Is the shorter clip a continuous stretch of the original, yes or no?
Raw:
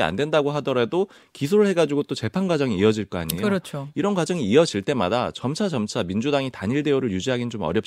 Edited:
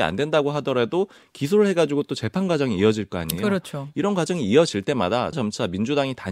no